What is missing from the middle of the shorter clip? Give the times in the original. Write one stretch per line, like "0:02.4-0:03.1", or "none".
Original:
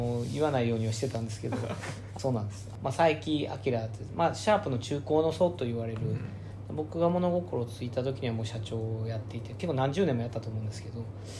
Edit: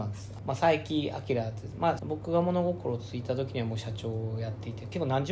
0:04.4-0:06.7